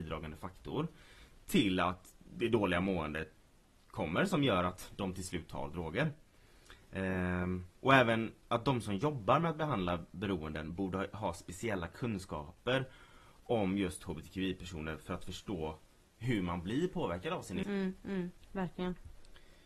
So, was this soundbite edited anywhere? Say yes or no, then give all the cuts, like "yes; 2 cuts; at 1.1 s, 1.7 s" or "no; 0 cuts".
yes; 1 cut; at 17.6 s